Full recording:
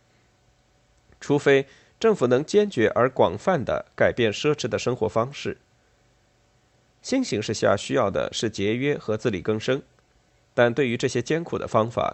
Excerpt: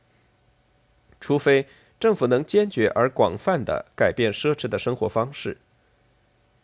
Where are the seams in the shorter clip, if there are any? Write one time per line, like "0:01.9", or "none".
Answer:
none

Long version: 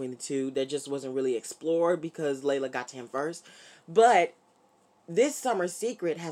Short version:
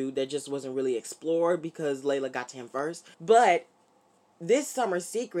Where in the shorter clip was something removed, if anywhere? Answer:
0:03.1

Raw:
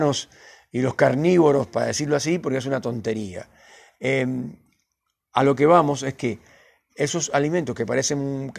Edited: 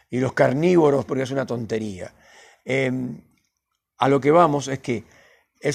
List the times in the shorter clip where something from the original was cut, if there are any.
0:01.1

